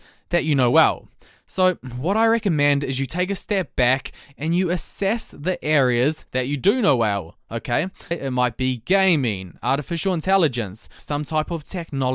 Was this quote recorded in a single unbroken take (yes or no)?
no